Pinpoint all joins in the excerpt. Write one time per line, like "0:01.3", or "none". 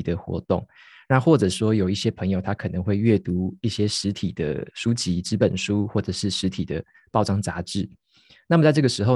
none